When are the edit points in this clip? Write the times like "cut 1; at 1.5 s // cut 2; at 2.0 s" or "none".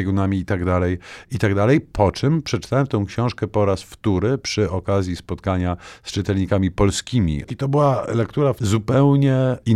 none